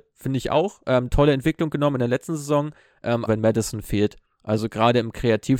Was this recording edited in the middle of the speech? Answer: yes; 1 cut; at 3.3 s

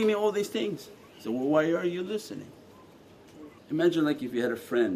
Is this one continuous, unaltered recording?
no; 1 cut; at 3.6 s

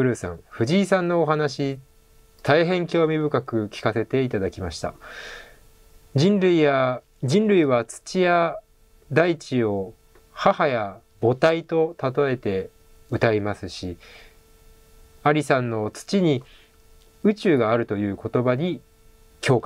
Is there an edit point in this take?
no; 0 cuts

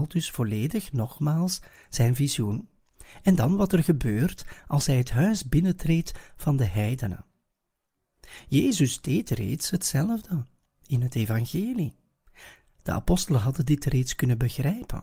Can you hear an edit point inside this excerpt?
no; 0 cuts

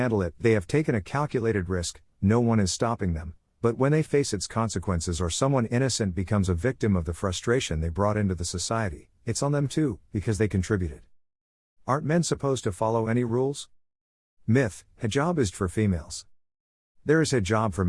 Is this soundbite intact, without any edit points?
no; 1 cut; at 15.5 s

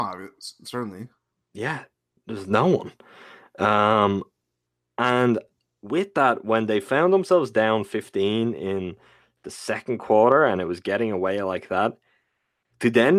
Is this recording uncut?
yes; 0 cuts

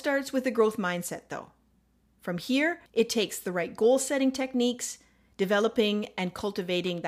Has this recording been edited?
yes; 1 cut; at 2.9 s

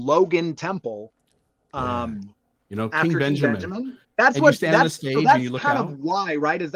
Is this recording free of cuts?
no; 2 cuts; at 2.5 s, 4.0 s

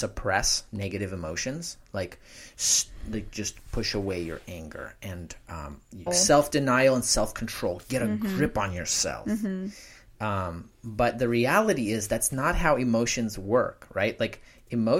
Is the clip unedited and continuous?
no; 1 cut; at 6.1 s

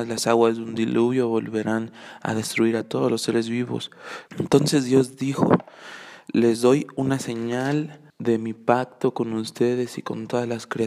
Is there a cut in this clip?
yes; 2 cuts; at 4.3 s, 8.1 s

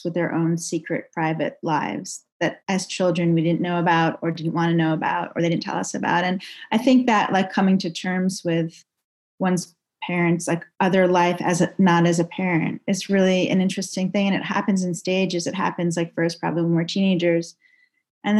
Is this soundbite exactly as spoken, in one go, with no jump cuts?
yes; 0 cuts

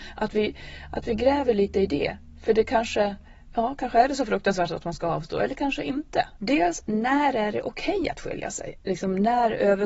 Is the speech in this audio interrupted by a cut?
yes; 2 cuts; at 6.4 s, 8.8 s

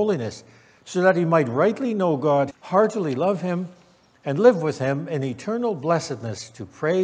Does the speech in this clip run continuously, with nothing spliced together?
no; 1 cut; at 2.5 s

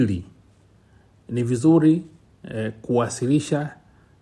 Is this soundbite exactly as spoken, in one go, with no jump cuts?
yes; 0 cuts

